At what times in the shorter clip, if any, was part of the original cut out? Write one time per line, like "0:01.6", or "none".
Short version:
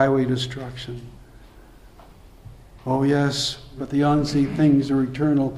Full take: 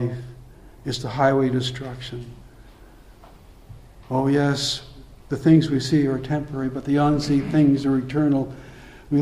0:03.8